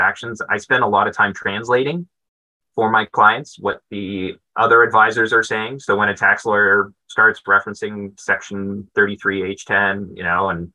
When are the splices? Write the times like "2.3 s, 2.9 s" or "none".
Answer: none